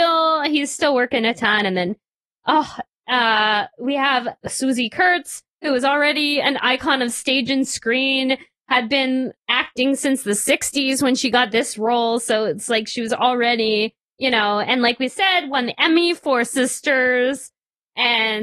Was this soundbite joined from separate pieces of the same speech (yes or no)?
no